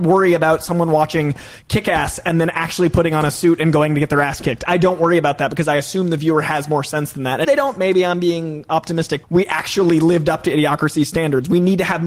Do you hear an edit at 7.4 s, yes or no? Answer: yes